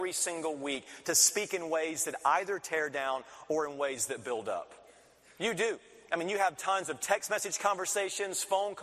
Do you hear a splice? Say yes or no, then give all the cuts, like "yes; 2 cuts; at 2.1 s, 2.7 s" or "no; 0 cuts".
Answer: no; 0 cuts